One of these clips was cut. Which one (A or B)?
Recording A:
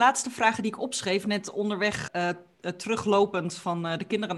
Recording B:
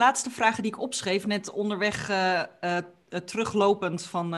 A